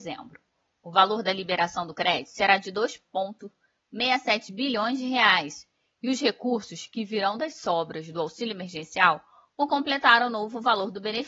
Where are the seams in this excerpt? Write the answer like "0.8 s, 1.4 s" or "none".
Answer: none